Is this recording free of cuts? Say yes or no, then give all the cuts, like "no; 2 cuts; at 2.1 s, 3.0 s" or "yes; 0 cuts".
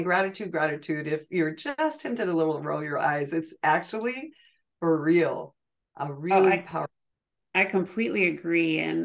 yes; 0 cuts